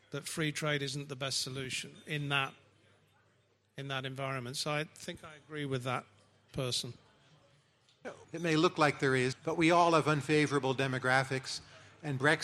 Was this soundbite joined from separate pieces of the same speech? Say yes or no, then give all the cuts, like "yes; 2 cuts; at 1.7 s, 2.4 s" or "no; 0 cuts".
yes; 2 cuts; at 8.2 s, 9.3 s